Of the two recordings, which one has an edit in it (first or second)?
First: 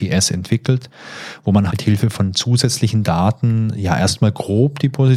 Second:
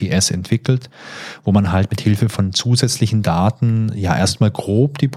first